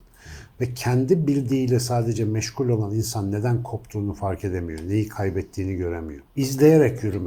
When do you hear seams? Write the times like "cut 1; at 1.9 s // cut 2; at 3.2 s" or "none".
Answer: cut 1; at 6.3 s